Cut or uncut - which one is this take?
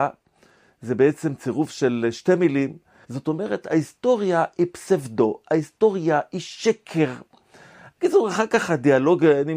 cut